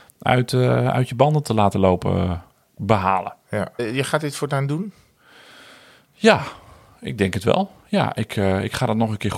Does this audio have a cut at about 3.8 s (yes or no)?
yes